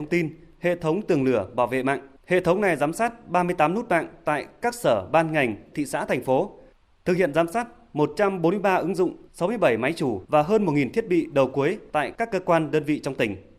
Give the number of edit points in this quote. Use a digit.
2